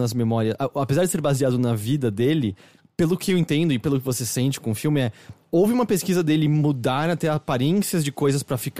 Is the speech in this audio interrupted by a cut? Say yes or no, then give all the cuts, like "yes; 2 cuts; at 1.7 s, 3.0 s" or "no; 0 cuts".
no; 0 cuts